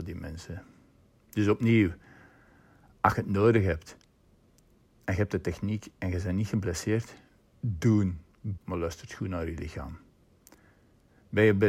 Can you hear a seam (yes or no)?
yes